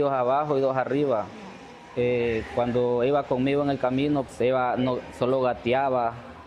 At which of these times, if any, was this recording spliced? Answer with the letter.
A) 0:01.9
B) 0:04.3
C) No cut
B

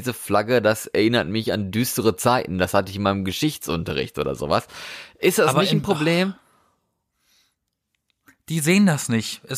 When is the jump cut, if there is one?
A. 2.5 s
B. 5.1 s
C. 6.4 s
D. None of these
D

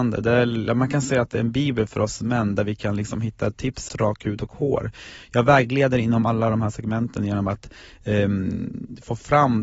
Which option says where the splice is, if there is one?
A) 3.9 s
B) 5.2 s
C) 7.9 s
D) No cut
A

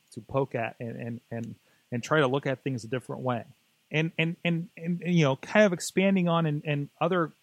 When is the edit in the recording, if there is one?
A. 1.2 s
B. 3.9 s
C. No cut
B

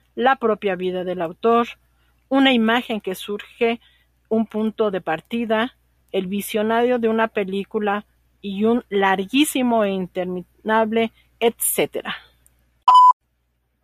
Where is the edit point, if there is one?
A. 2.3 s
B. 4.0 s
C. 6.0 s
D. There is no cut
C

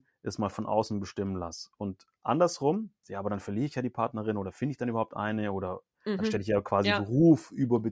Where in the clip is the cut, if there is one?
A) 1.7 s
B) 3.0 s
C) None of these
B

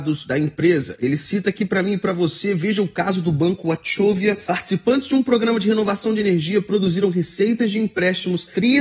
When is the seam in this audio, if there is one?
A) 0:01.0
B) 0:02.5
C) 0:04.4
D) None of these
D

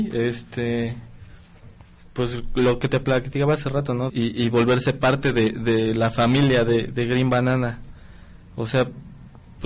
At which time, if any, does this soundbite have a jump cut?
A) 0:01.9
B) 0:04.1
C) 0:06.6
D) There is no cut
B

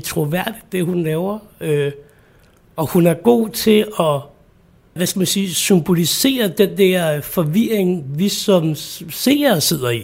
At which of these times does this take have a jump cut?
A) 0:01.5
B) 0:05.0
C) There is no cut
B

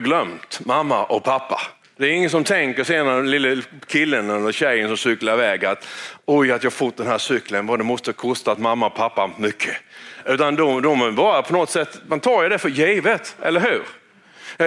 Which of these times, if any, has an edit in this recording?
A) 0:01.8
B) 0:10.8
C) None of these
A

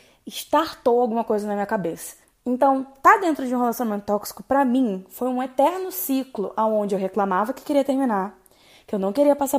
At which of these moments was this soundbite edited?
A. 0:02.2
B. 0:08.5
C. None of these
A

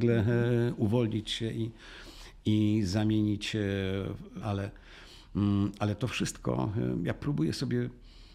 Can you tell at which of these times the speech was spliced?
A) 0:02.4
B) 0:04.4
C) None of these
B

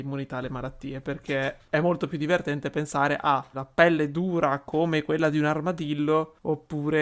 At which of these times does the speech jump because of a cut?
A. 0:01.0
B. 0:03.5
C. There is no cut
B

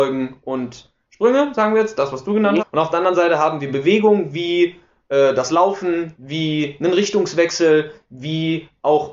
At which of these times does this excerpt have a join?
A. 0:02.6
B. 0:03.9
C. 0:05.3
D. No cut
A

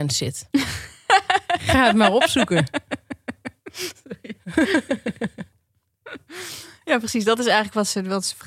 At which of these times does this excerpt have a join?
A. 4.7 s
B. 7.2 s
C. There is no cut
C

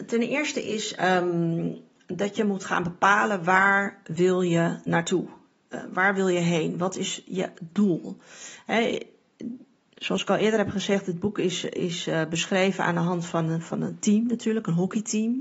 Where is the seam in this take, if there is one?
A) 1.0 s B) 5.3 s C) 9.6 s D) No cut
D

